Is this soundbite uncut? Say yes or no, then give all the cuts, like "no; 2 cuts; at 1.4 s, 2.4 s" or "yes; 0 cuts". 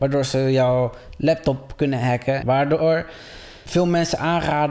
no; 2 cuts; at 2.4 s, 3.7 s